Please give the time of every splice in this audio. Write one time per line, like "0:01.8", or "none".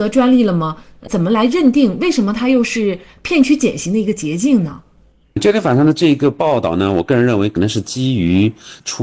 none